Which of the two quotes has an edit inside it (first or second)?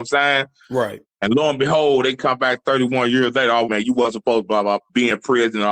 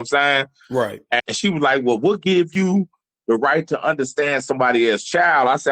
first